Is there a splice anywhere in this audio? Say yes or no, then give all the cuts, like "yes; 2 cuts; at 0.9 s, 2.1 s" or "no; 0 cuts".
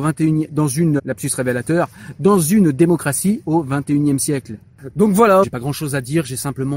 yes; 2 cuts; at 1.0 s, 5.4 s